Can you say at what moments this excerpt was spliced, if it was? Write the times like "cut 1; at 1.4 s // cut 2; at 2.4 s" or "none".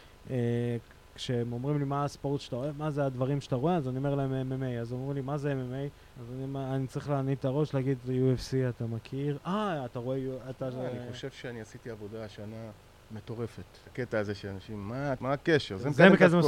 cut 1; at 6.1 s // cut 2; at 13.9 s // cut 3; at 15.2 s